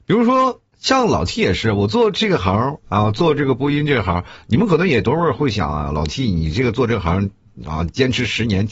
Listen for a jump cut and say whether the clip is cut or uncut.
uncut